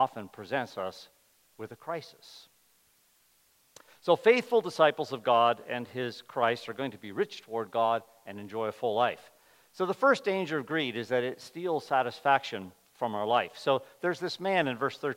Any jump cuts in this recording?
no; 0 cuts

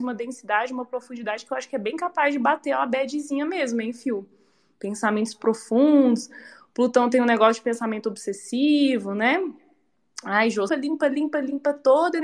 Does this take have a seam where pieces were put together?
yes; 1 cut; at 10.7 s

